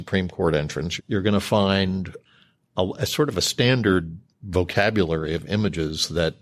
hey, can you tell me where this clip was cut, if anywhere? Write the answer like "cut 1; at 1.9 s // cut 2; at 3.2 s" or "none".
cut 1; at 1.0 s